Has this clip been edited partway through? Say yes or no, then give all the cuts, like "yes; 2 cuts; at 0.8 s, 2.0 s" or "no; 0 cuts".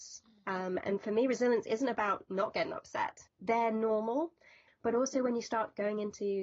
yes; 2 cuts; at 3.3 s, 4.7 s